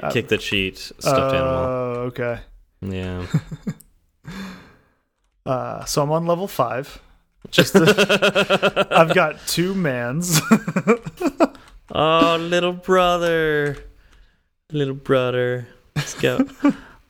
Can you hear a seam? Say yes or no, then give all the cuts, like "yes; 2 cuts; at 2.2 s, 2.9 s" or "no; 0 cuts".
no; 0 cuts